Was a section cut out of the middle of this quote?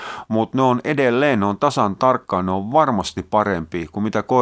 no; 0 cuts

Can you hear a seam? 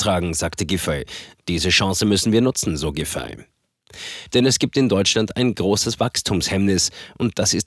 yes; 2 cuts; at 1.4 s, 4.3 s

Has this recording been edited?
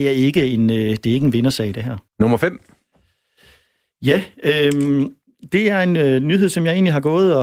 yes; 1 cut; at 2.1 s

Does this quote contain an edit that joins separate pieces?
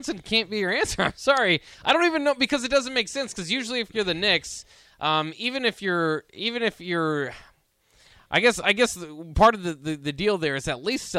no; 0 cuts

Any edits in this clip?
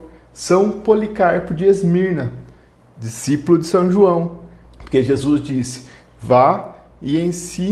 yes; 1 cut; at 4.6 s

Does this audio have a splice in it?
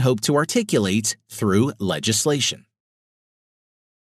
no; 0 cuts

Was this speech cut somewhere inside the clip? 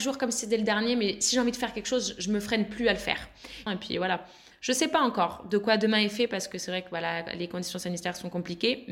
yes; 1 cut; at 3.7 s

